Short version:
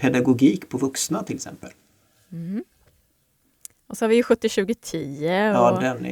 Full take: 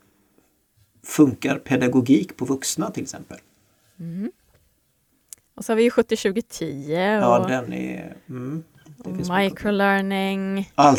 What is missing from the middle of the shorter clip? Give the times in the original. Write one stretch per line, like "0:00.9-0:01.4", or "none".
none